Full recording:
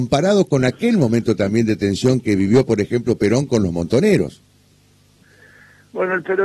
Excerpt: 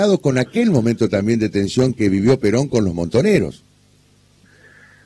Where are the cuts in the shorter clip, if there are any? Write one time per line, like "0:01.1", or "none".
0:02.4